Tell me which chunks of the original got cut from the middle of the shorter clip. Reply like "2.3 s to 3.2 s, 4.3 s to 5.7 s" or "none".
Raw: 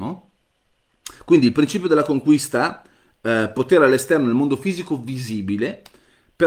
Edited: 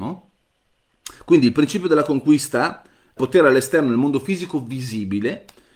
3.2 s to 3.5 s